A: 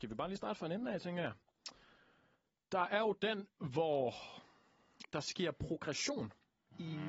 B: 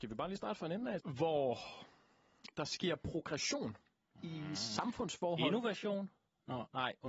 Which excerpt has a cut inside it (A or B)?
B